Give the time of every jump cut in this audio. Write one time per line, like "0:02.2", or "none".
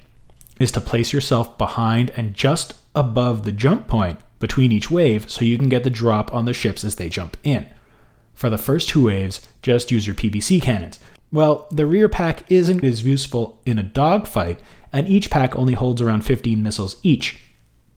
0:11.2
0:12.8